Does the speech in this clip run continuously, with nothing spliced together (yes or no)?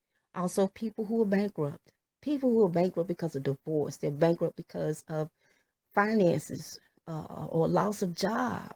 no